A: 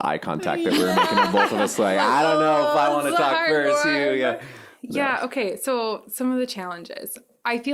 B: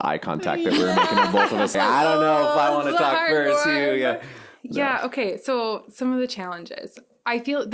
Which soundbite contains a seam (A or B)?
B